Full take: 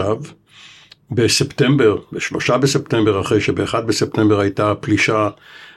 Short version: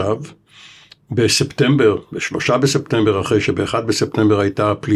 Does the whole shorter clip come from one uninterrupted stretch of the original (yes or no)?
yes